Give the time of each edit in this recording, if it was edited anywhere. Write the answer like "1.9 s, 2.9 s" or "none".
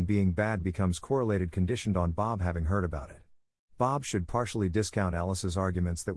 none